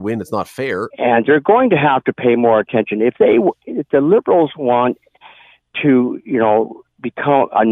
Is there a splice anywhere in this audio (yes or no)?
yes